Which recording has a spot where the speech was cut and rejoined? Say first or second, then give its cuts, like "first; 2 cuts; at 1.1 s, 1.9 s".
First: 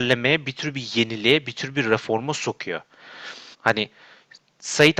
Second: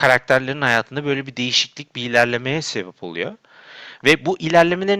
first; 1 cut; at 3.5 s